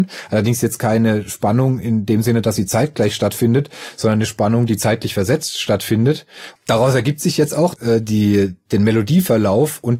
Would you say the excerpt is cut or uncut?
cut